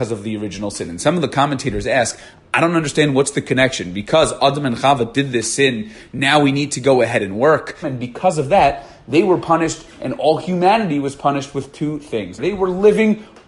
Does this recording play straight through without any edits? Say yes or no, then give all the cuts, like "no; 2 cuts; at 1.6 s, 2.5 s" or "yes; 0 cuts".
no; 2 cuts; at 7.8 s, 12.4 s